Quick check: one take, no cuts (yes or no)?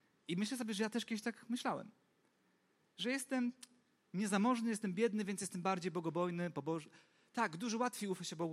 yes